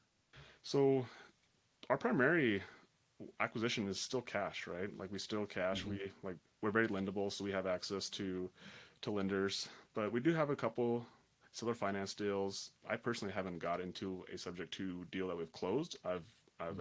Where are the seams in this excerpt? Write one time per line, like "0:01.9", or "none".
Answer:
0:12.8